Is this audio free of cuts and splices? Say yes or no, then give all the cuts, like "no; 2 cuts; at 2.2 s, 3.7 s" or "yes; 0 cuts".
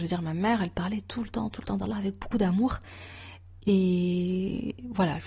yes; 0 cuts